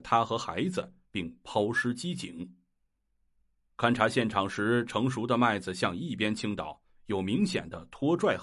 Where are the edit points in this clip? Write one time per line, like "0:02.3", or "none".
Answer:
none